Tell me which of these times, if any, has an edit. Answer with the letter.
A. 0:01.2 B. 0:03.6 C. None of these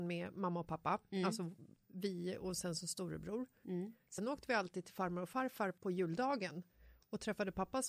B